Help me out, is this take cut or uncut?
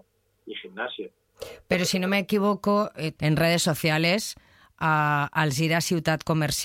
cut